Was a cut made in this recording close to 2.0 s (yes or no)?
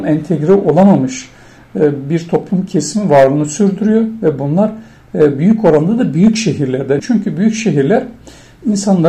no